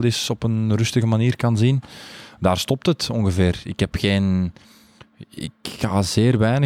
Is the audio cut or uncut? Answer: uncut